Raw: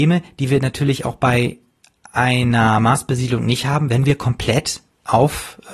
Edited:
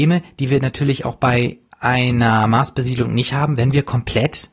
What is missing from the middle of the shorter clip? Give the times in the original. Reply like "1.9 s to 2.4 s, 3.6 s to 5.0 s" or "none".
1.7 s to 2.0 s